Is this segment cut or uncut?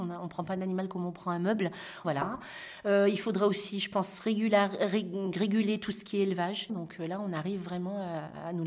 cut